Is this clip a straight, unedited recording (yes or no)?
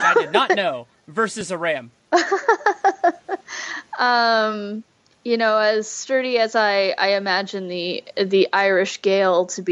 yes